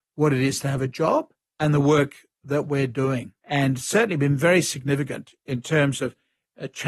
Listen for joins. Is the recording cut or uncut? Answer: cut